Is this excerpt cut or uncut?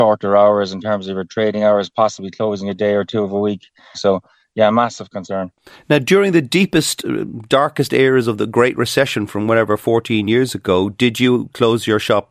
cut